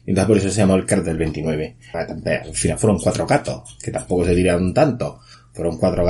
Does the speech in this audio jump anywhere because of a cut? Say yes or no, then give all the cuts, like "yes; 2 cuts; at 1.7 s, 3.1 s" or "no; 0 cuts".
yes; 1 cut; at 1.9 s